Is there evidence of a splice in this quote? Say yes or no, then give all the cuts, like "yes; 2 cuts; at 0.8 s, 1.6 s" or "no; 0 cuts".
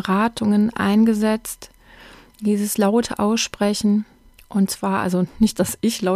no; 0 cuts